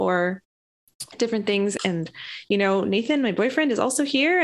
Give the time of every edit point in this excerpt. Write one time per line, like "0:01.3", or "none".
0:01.8